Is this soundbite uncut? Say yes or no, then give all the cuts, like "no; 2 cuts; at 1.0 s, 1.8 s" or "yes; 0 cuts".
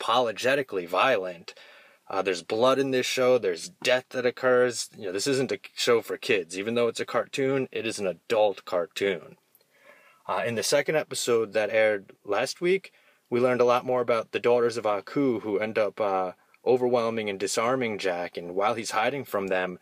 yes; 0 cuts